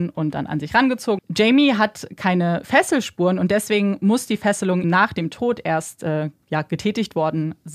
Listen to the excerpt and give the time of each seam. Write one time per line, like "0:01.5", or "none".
0:01.2
0:04.8